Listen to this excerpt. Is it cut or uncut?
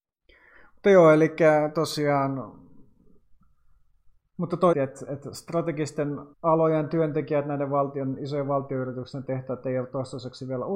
cut